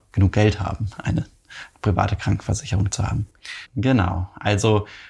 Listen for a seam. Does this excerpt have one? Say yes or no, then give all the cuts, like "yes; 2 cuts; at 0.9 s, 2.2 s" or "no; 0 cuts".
yes; 1 cut; at 3.6 s